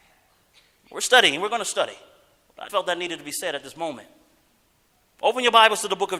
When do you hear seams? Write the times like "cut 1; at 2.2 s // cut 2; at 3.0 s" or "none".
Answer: cut 1; at 2.7 s